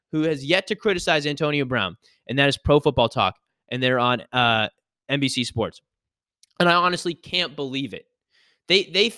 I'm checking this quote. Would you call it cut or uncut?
uncut